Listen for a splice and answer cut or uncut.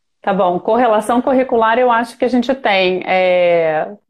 uncut